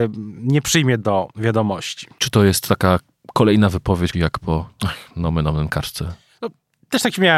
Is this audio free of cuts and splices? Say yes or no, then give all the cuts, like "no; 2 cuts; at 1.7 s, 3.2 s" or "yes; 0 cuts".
no; 2 cuts; at 2.2 s, 4.1 s